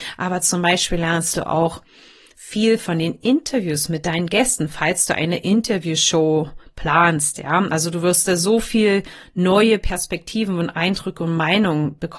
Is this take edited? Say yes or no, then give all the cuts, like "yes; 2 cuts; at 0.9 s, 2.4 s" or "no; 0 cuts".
no; 0 cuts